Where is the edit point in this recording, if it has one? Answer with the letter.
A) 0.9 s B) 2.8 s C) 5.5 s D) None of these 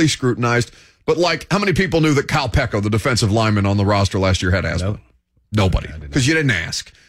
D